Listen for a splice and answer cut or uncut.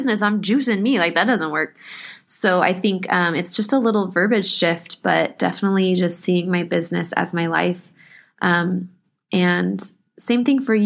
uncut